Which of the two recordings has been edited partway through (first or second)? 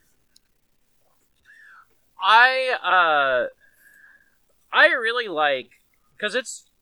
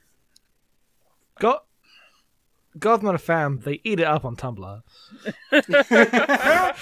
second